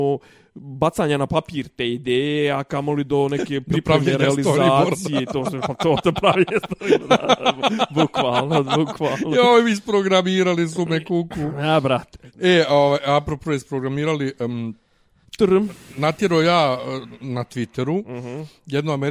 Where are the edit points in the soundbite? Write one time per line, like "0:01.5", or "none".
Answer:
none